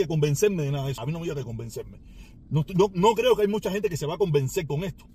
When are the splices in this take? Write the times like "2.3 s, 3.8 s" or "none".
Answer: 1.0 s